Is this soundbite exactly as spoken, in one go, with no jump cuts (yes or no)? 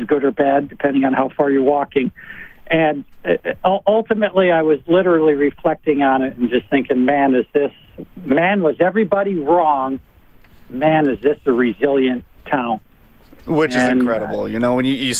yes